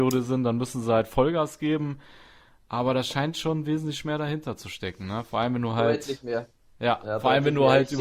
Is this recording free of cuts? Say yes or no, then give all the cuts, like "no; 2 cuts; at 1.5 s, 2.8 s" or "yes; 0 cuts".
yes; 0 cuts